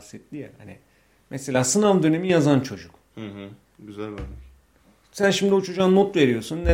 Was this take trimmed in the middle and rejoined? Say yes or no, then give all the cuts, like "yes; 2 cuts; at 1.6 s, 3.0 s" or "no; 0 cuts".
yes; 1 cut; at 3.6 s